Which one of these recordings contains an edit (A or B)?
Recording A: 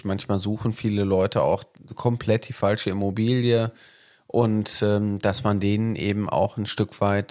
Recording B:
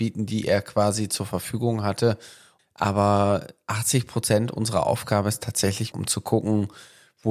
B